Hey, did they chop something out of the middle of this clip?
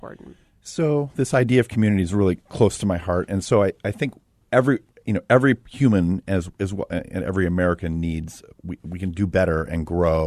no; 0 cuts

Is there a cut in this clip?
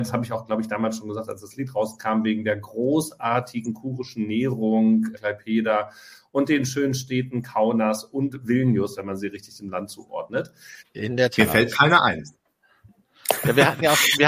yes; 2 cuts; at 5.1 s, 10.8 s

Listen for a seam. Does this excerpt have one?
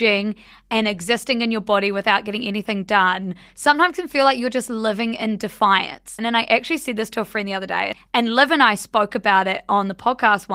yes; 1 cut; at 6.2 s

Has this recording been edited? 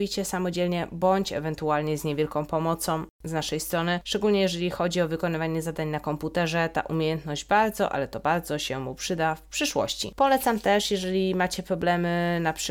no; 0 cuts

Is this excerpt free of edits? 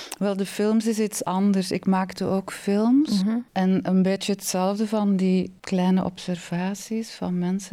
yes; 0 cuts

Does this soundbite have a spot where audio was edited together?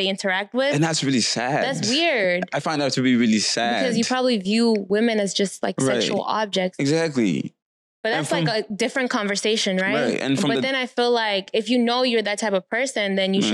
no; 0 cuts

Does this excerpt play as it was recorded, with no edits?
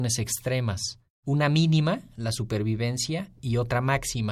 yes; 0 cuts

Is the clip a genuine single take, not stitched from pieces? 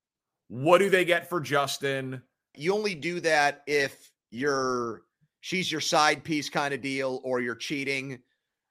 no; 1 cut; at 2.5 s

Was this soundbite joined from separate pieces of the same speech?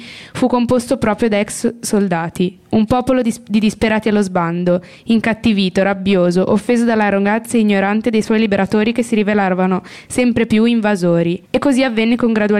yes; 1 cut; at 11.4 s

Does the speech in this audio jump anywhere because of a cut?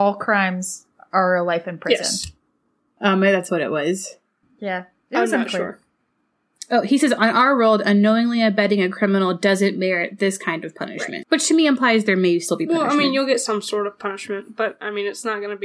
yes; 2 cuts; at 4.4 s, 11.2 s

